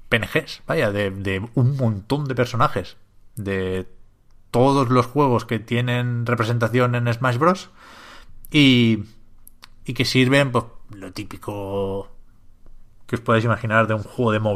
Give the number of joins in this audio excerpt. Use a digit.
0